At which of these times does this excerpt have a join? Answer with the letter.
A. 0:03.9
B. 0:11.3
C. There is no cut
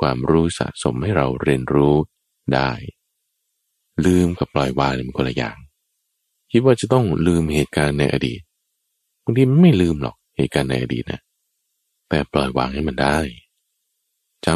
C